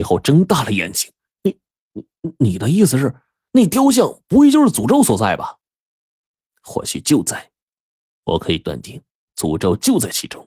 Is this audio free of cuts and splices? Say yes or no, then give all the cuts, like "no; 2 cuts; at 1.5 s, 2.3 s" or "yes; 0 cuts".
yes; 0 cuts